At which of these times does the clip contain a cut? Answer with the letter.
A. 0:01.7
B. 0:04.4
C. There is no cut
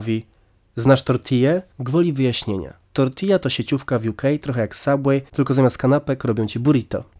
A